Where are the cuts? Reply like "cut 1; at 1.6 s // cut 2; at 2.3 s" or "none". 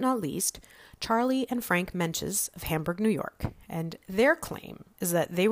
none